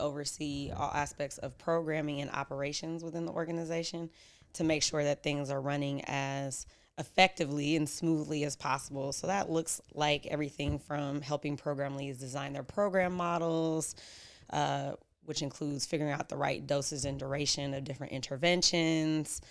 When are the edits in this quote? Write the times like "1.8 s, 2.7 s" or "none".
none